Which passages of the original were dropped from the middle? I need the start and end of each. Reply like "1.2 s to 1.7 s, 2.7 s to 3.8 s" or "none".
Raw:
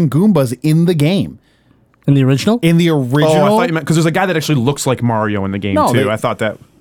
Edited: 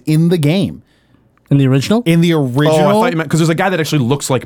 none